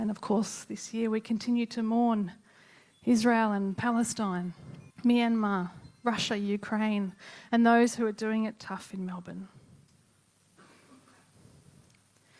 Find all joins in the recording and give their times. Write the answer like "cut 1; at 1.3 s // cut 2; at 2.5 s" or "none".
cut 1; at 4.9 s